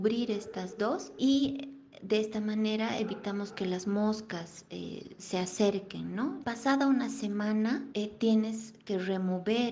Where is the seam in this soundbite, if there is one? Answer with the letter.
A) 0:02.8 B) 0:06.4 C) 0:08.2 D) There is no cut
B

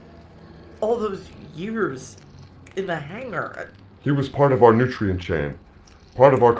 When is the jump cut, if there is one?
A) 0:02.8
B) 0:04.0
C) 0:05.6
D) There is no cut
B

